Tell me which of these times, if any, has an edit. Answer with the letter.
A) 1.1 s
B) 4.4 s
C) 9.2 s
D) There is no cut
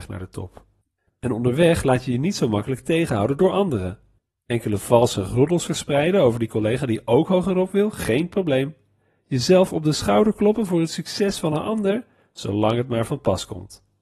A